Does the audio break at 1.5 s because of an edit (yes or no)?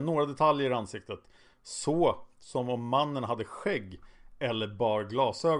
no